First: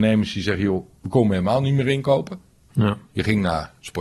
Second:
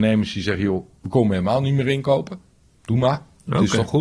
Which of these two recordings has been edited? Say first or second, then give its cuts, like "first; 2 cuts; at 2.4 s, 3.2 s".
first; 1 cut; at 2.7 s